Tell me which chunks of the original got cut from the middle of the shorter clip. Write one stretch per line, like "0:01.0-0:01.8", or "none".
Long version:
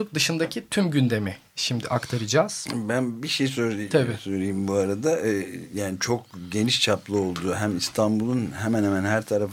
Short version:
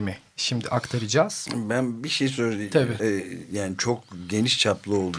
0:04.2-0:05.2